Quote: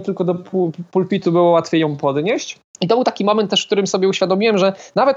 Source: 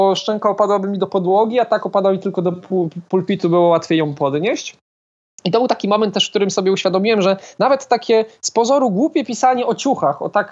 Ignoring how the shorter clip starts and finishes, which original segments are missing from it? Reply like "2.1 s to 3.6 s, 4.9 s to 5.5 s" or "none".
4.9 s to 5.3 s